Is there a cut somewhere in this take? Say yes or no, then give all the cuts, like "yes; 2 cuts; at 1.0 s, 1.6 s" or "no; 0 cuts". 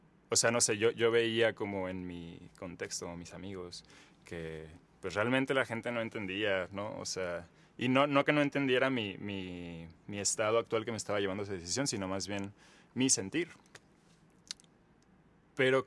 no; 0 cuts